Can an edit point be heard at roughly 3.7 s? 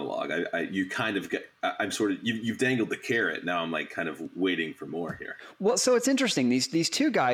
no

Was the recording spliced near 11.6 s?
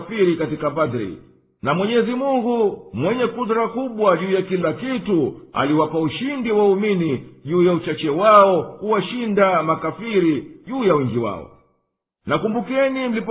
no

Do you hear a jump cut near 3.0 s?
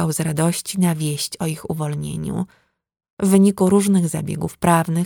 yes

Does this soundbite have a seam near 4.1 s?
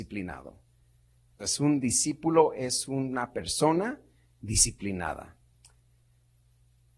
no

